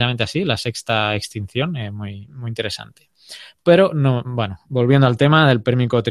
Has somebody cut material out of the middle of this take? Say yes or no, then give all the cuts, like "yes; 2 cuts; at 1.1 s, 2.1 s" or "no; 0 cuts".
no; 0 cuts